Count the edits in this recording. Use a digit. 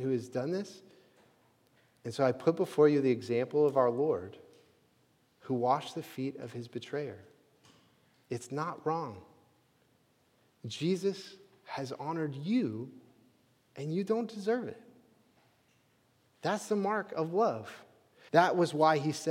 1